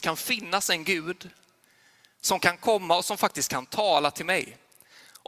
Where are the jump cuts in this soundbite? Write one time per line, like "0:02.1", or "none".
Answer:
none